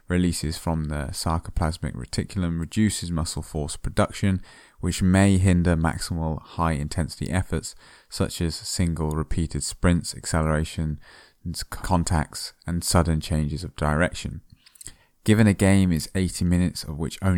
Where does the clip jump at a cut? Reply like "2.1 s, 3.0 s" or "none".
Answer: 11.8 s

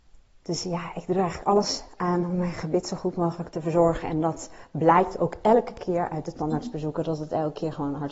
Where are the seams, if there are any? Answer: none

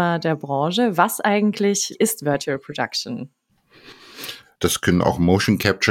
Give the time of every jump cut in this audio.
4.6 s

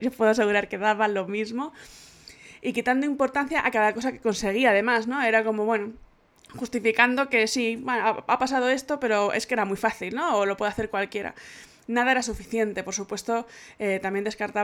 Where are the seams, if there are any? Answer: none

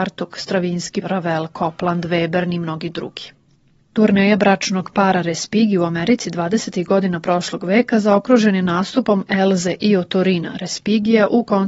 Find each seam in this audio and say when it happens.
1.0 s

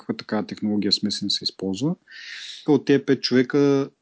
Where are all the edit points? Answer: 2.7 s

